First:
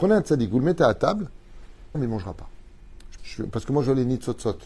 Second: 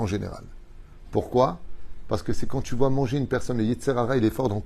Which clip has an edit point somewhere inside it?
first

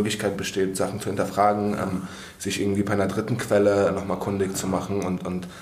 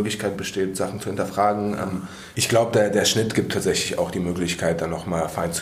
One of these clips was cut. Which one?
second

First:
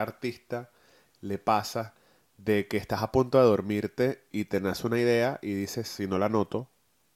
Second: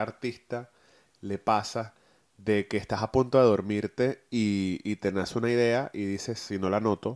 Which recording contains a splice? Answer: first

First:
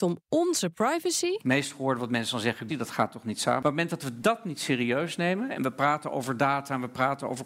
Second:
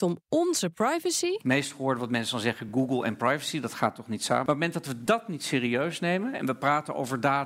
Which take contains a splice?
first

